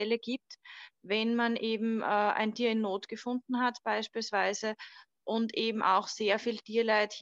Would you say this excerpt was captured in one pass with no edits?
yes; 0 cuts

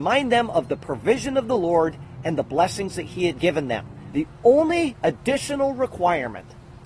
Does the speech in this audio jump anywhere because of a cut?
yes; 1 cut; at 4.1 s

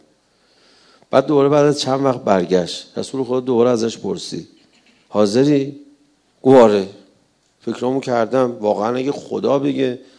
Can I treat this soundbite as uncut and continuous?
yes; 0 cuts

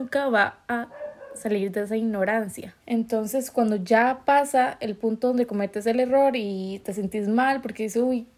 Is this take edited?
yes; 1 cut; at 2.8 s

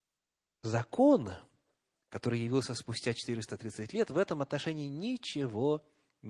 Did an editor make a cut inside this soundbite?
no; 0 cuts

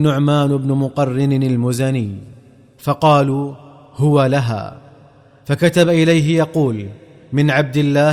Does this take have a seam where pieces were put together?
no; 0 cuts

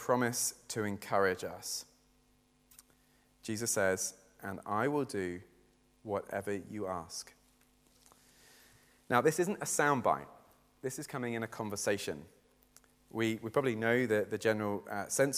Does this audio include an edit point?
no; 0 cuts

